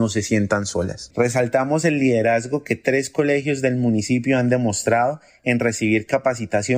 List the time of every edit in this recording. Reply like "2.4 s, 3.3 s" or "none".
1.1 s